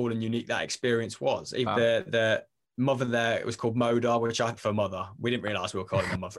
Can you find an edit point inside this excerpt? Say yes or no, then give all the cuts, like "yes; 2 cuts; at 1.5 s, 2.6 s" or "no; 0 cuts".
yes; 2 cuts; at 1.7 s, 4.6 s